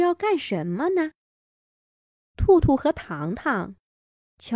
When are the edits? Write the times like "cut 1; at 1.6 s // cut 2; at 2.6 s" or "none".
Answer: none